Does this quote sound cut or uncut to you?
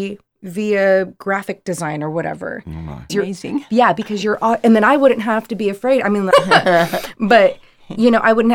cut